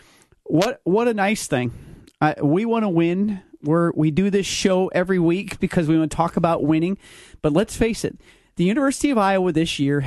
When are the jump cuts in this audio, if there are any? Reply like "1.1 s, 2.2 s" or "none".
none